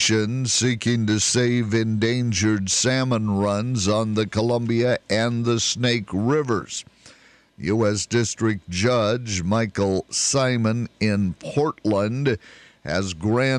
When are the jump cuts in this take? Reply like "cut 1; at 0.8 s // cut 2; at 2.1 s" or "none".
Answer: none

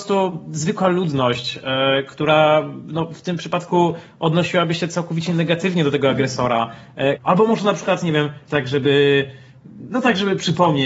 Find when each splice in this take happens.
cut 1; at 7.2 s // cut 2; at 8.5 s

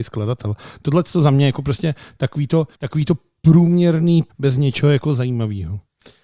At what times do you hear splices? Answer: cut 1; at 2.7 s // cut 2; at 4.3 s

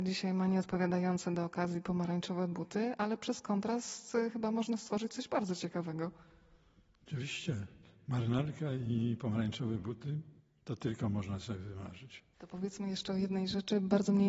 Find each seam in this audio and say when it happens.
none

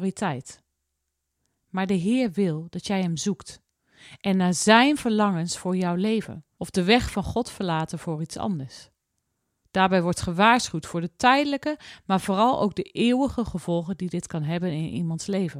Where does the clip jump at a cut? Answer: cut 1; at 6.6 s // cut 2; at 9.6 s

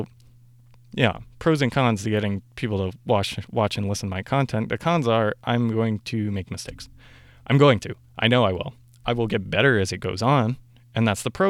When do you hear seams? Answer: none

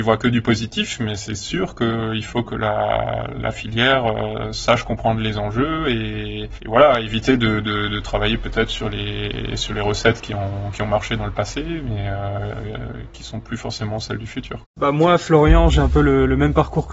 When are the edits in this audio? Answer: cut 1; at 14.6 s

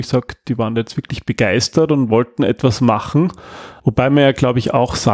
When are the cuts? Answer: cut 1; at 3.8 s

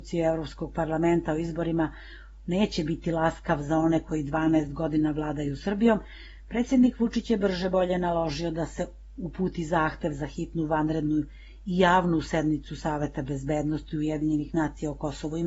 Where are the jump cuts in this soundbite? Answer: none

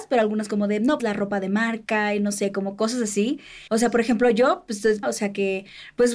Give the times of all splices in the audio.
cut 1; at 1.0 s // cut 2; at 3.7 s // cut 3; at 5.0 s

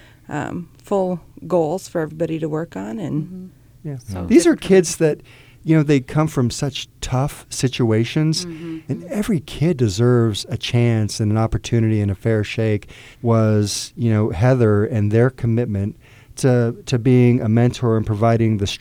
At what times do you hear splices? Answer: cut 1; at 3.8 s // cut 2; at 8.9 s // cut 3; at 13.1 s

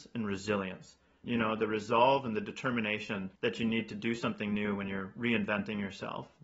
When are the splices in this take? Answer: cut 1; at 1.2 s // cut 2; at 3.4 s

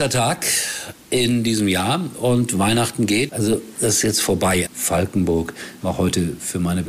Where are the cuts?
cut 1; at 3.3 s // cut 2; at 4.7 s // cut 3; at 5.8 s

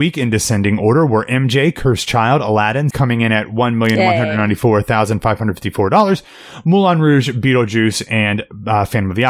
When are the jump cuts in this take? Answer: cut 1; at 2.9 s

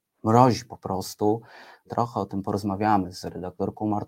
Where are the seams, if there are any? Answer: cut 1; at 1.9 s

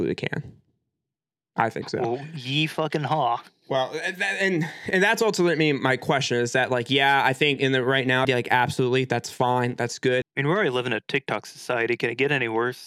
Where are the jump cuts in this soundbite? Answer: cut 1; at 8.2 s // cut 2; at 10.2 s

